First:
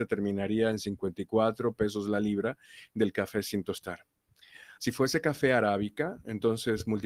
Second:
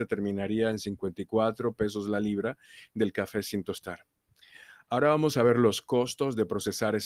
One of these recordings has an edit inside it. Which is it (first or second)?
first